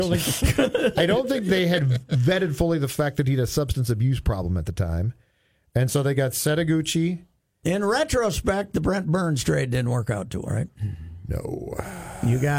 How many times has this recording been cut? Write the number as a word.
two